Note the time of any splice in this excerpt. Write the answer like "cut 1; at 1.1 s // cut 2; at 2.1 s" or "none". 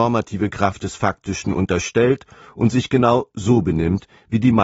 none